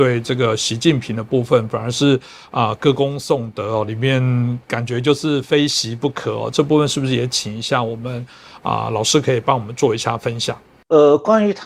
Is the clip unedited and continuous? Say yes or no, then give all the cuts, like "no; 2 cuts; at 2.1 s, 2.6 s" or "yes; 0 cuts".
yes; 0 cuts